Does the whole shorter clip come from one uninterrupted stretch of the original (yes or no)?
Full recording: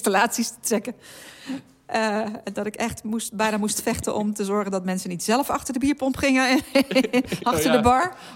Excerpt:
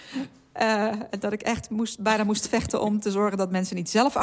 yes